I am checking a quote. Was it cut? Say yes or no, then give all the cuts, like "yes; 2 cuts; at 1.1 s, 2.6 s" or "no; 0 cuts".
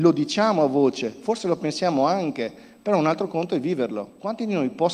no; 0 cuts